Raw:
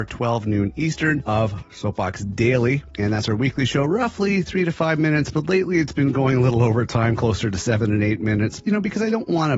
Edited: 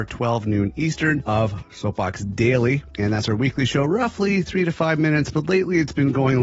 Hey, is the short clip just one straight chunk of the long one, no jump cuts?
yes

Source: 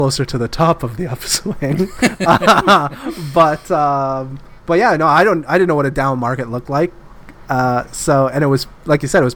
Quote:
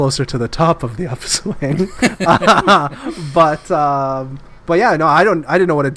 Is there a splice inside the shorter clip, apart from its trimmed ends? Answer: no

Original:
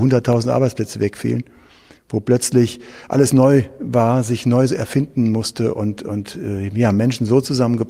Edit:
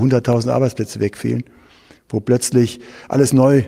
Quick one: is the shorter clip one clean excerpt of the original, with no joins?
yes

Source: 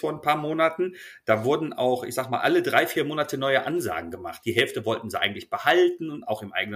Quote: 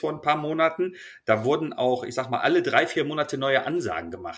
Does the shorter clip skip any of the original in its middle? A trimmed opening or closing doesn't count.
no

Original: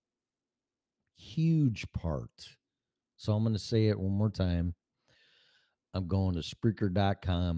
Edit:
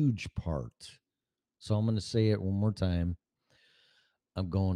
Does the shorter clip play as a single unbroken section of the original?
yes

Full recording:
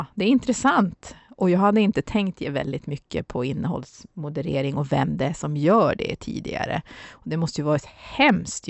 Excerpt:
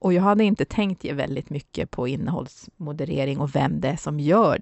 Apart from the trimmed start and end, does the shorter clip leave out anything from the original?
no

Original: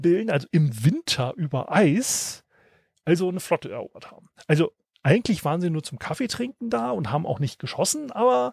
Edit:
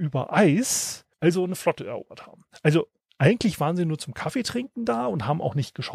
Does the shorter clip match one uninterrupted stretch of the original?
no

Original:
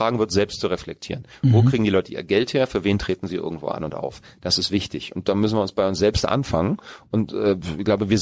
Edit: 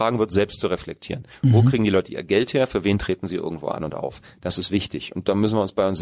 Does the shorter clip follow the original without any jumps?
yes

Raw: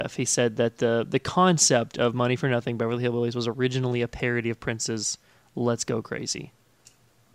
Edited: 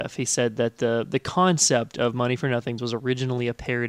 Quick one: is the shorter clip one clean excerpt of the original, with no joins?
no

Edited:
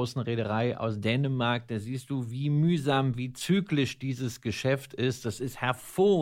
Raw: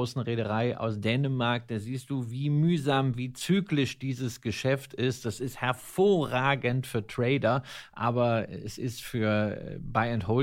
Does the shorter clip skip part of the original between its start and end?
no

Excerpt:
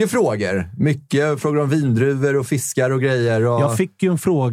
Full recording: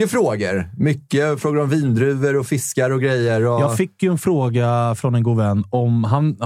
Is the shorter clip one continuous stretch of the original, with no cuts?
yes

